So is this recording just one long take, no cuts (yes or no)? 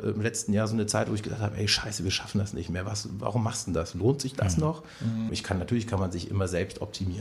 no